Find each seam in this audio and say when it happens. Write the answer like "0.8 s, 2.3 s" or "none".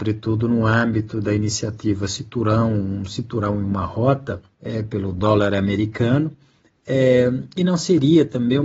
4.5 s